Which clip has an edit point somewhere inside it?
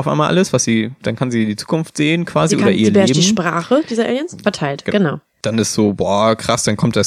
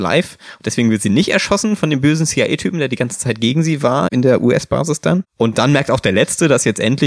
first; 1 cut; at 4.4 s

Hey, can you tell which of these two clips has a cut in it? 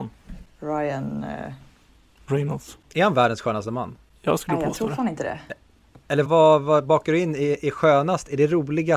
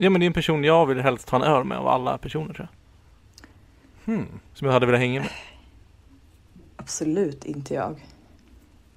first; 1 cut; at 6.3 s

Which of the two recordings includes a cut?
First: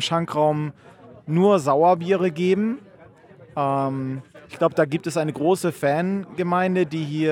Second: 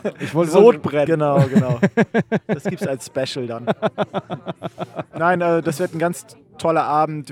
second; 1 cut; at 1.1 s

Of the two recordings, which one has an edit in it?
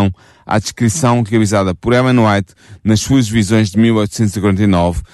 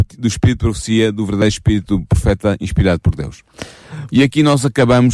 second; 1 cut; at 4.1 s

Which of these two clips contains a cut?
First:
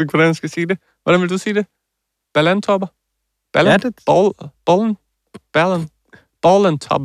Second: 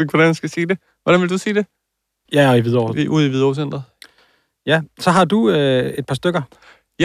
second; 1 cut; at 2.3 s

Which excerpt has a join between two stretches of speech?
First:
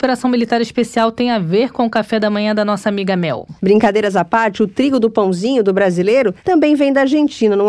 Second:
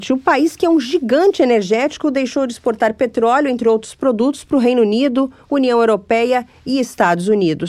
first; 1 cut; at 3.6 s

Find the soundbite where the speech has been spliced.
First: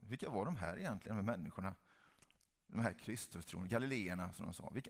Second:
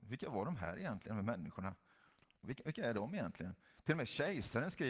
second; 1 cut; at 2.4 s

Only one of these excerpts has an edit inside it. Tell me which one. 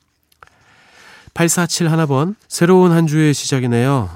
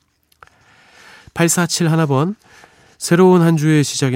first; 1 cut; at 2.4 s

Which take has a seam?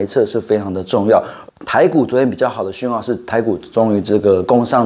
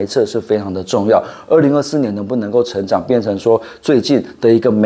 first; 1 cut; at 1.5 s

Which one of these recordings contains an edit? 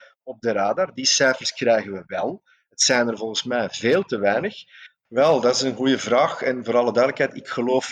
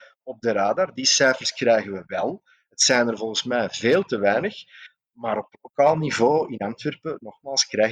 first; 1 cut; at 5.1 s

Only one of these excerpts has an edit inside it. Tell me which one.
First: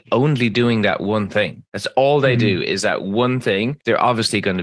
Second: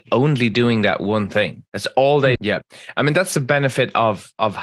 second; 1 cut; at 2.4 s

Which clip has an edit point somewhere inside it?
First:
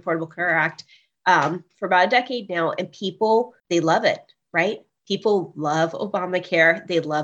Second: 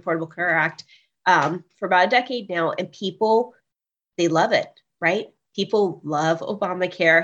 first; 1 cut; at 3.6 s

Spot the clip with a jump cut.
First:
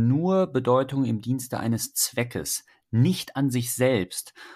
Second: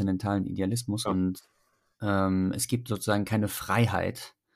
second; 1 cut; at 1.0 s

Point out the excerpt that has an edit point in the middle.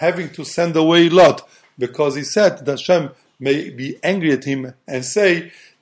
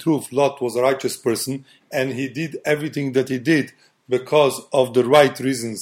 second; 1 cut; at 1.8 s

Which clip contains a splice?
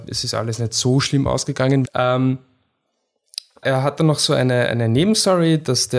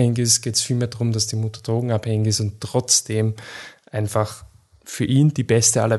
first; 2 cuts; at 1.9 s, 3.6 s

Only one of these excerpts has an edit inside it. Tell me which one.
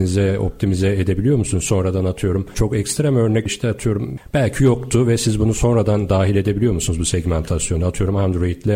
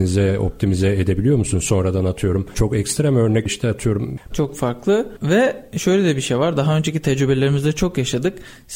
second; 1 cut; at 4.3 s

